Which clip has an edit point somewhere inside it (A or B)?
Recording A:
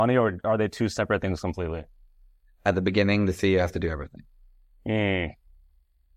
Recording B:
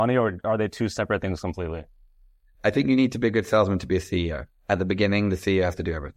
A